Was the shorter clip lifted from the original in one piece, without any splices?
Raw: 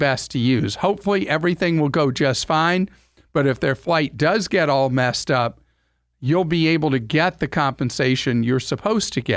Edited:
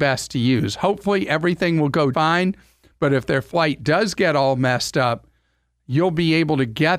no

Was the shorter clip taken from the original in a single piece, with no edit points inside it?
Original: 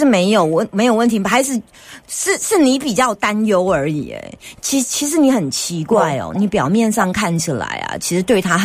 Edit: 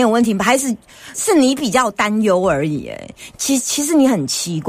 no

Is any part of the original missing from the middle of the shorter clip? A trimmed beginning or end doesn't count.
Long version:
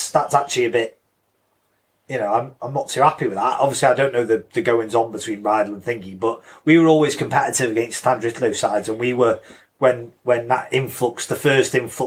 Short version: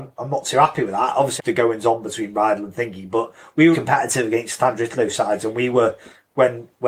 yes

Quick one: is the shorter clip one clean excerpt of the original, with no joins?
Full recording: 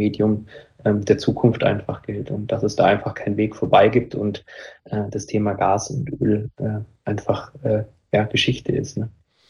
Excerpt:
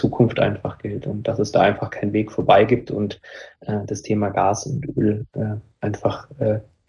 yes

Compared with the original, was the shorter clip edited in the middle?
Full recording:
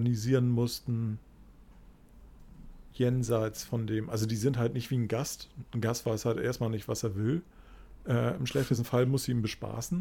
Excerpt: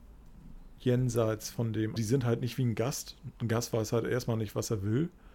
yes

